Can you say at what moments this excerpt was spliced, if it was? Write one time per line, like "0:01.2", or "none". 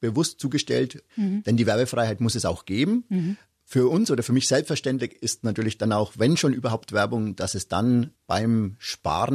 0:01.1